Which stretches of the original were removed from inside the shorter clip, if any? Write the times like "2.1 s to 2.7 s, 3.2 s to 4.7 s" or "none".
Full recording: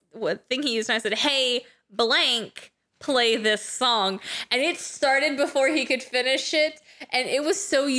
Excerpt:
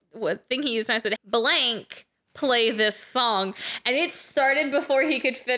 1.2 s to 1.8 s